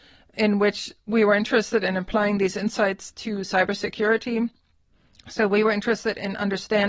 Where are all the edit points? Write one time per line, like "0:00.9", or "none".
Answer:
none